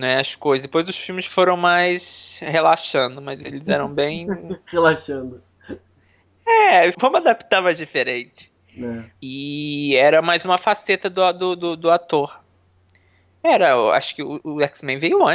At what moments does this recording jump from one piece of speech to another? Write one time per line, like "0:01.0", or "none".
0:06.9
0:09.1